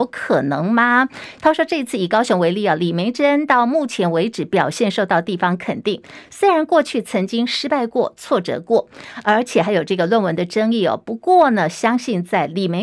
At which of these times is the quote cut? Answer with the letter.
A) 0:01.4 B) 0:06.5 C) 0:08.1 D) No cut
A